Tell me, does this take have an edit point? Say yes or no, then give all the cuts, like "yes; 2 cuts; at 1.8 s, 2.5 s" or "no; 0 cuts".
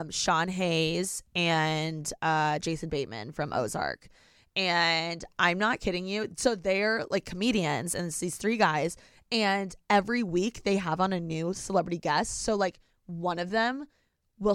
no; 0 cuts